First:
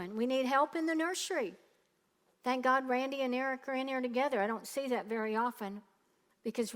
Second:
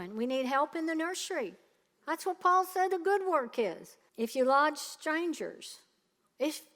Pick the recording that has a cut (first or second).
second